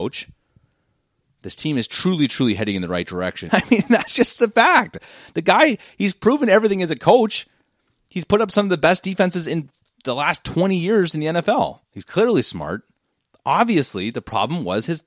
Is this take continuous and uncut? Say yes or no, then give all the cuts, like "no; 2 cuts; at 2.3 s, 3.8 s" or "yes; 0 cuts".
no; 2 cuts; at 3.5 s, 11.8 s